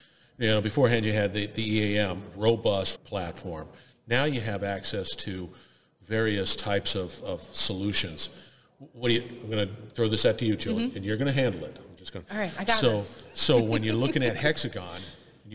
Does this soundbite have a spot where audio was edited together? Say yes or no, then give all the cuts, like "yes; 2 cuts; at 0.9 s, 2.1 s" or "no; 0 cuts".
yes; 1 cut; at 3.0 s